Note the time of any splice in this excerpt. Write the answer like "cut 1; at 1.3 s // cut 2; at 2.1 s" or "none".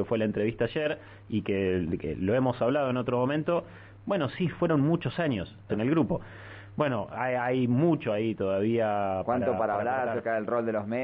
cut 1; at 5.7 s